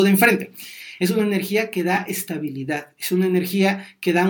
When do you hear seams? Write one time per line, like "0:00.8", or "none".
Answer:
0:01.0